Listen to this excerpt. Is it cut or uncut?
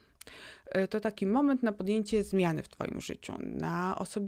uncut